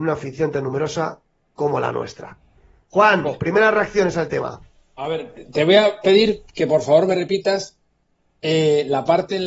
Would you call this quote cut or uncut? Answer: uncut